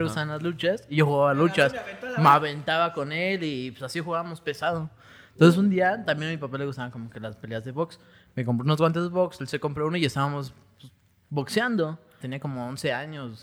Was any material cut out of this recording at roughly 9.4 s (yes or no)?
no